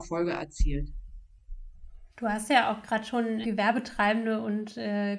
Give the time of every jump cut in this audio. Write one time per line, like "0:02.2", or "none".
0:02.1
0:03.4